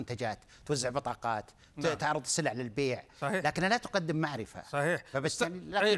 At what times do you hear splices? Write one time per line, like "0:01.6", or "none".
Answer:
none